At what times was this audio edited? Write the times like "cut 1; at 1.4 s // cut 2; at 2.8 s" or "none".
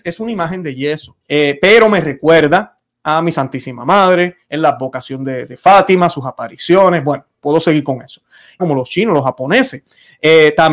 cut 1; at 1.2 s // cut 2; at 8.6 s

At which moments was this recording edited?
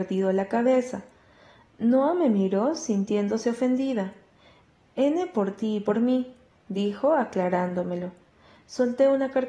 cut 1; at 6.5 s

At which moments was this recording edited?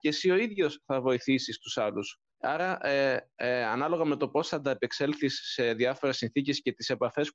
cut 1; at 2.3 s

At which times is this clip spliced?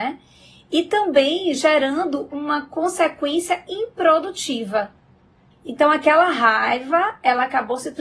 cut 1; at 2.3 s // cut 2; at 5.5 s

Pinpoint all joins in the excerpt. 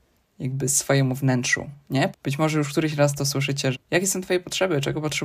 cut 1; at 2.1 s // cut 2; at 3.7 s

